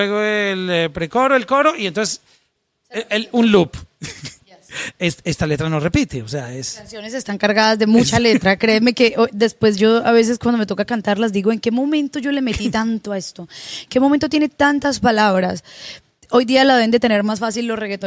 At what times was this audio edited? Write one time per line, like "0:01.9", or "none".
none